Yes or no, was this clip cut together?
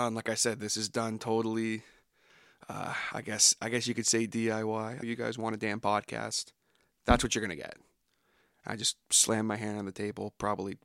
yes